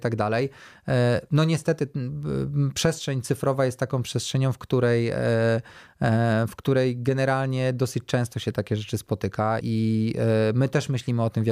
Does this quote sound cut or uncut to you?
cut